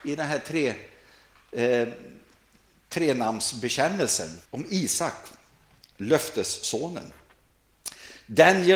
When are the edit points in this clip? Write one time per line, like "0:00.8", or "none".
0:04.4

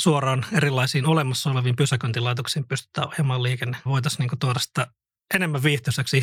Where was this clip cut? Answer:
0:03.9

